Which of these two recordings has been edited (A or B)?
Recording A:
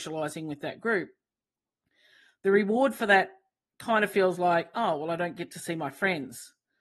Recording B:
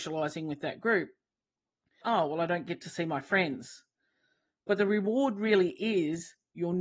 B